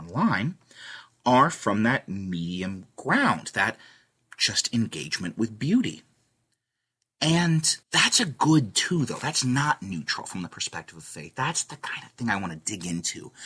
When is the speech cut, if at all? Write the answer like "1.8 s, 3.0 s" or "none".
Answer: 7.8 s